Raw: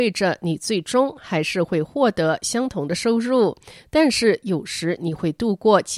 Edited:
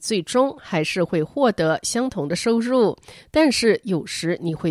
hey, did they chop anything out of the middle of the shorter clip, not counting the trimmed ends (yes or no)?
no